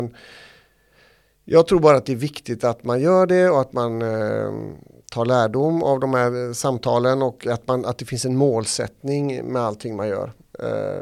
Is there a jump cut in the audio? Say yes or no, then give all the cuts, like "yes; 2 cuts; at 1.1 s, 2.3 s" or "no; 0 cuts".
no; 0 cuts